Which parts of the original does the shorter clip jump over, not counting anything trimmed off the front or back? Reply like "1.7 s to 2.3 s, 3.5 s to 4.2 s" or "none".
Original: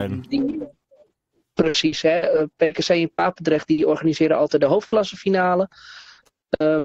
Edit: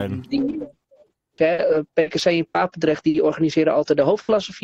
1.4 s to 2.0 s

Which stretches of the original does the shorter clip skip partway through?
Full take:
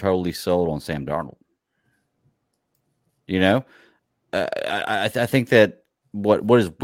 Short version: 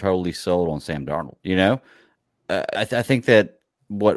1.4 s to 3.2 s, 4.6 s to 5.0 s

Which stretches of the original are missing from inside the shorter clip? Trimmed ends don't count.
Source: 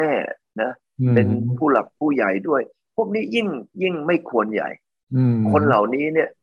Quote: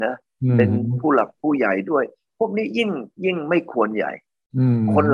none

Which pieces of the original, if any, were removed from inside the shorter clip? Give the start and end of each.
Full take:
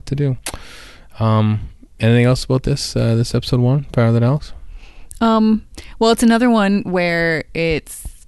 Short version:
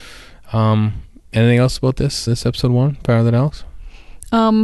2.9 s to 3.2 s

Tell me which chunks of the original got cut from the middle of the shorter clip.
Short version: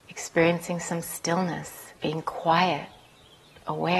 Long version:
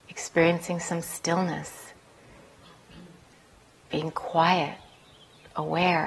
2.0 s to 3.9 s

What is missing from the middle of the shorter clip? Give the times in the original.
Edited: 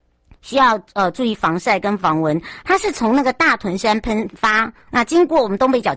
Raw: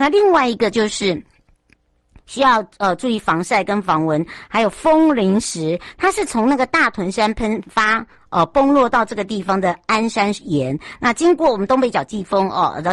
4.5 s to 5.9 s, 8.2 s to 11.0 s

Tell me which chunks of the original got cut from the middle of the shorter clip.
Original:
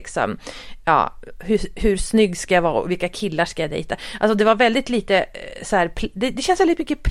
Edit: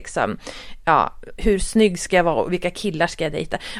1.4 s to 1.7 s

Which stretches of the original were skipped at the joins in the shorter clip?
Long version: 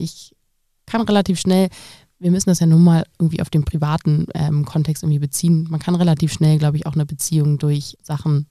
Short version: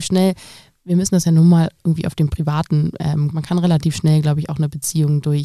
4.7 s to 5.7 s

